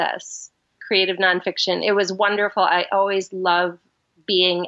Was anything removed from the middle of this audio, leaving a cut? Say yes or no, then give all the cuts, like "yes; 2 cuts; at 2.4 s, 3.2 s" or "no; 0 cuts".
no; 0 cuts